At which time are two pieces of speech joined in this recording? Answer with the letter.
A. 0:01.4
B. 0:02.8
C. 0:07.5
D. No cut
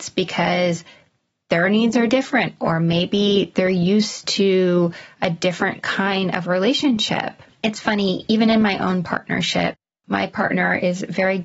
C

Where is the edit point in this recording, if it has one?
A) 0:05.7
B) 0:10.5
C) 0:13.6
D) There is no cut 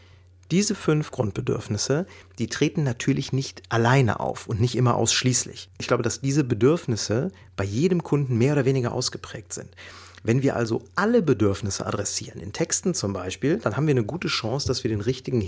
D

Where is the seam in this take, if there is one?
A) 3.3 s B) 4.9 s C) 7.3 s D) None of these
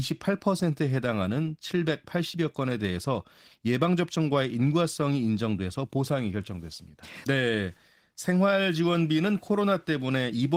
C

